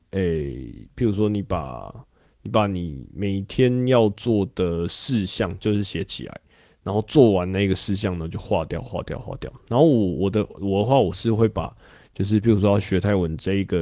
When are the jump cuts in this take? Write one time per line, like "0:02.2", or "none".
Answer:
none

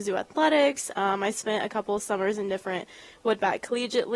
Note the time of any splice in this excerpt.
none

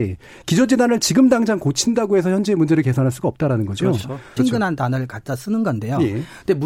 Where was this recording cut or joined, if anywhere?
0:04.4

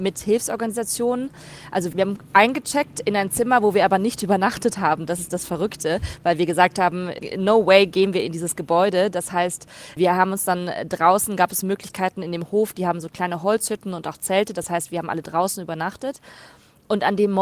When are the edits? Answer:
none

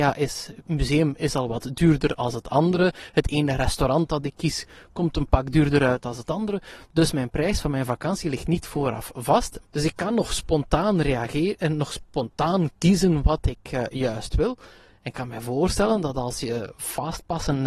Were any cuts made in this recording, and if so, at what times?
0:09.6

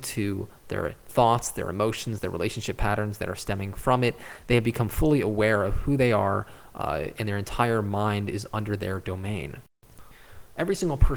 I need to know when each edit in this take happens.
0:02.2

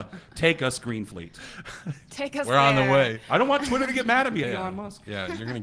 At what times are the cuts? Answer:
0:04.4

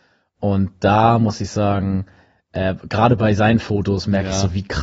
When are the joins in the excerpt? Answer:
none

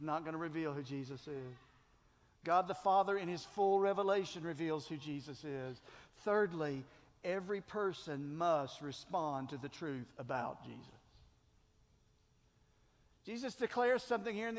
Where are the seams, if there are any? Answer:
none

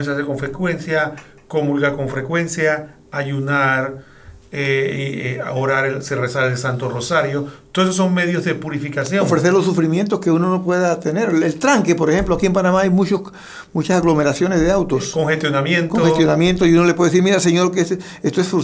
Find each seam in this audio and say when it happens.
none

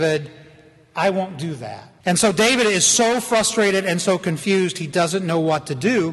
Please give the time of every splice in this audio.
0:02.0

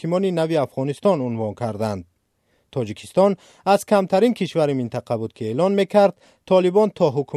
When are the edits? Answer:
none

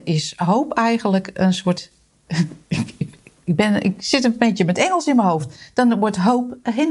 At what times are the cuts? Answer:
none

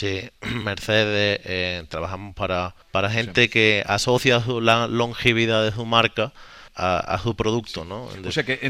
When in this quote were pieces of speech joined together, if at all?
0:02.8
0:06.7

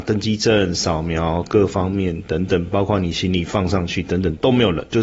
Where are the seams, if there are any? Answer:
none

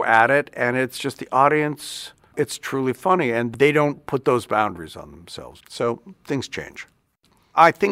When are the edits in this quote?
0:02.3
0:05.6

